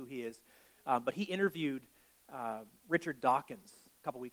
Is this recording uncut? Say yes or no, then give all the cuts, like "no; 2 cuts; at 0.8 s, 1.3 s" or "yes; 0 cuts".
yes; 0 cuts